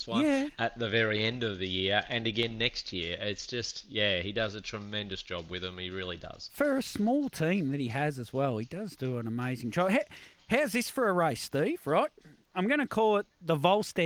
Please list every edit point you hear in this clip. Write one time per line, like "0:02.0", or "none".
none

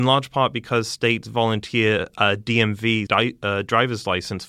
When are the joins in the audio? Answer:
0:03.1

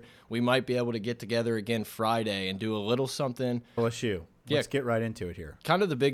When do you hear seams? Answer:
0:03.8

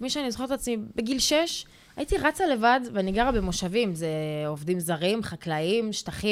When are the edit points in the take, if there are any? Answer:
none

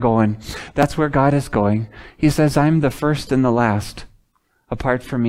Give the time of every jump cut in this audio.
none

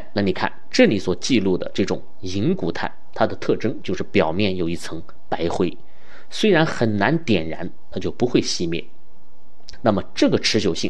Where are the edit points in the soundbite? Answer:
0:07.9
0:09.7

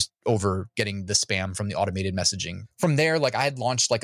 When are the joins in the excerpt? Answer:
none

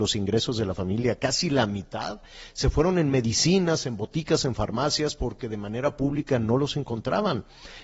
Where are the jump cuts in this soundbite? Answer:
none

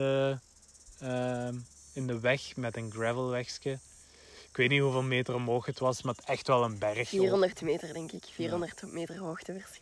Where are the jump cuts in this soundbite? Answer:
none

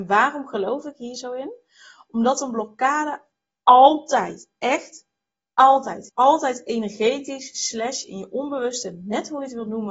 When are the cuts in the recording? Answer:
0:06.1

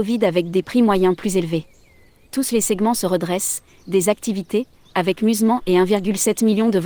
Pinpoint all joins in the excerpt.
0:02.2

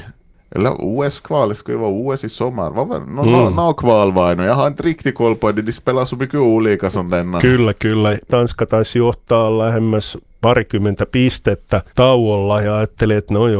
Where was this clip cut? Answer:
0:08.3
0:11.9

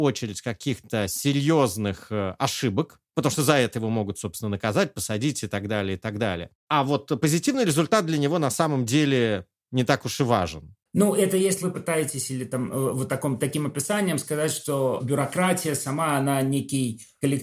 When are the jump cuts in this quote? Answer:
none

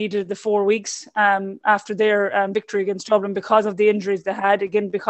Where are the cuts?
none

